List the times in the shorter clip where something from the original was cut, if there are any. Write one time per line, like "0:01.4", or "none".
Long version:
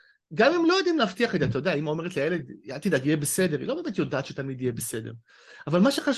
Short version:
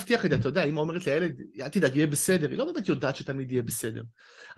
none